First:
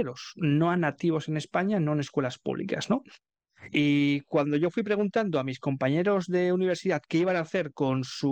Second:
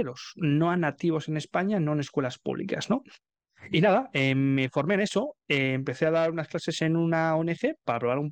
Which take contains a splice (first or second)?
first